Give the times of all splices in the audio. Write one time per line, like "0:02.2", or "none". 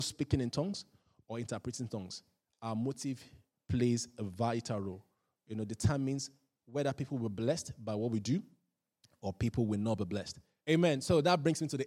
0:10.6